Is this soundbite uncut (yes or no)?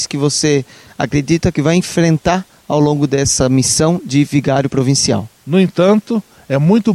no